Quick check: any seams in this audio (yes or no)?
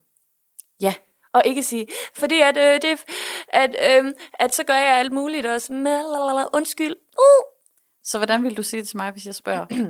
no